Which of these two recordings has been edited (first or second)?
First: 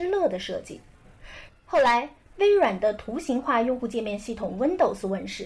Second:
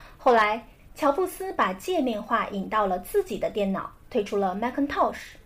first